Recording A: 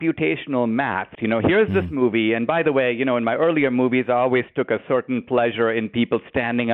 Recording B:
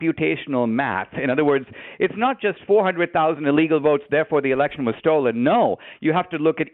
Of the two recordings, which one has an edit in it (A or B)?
A